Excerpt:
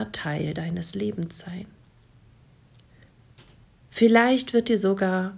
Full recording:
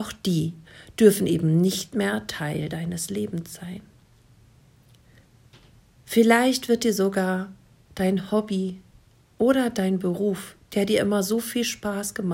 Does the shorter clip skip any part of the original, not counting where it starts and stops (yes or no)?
no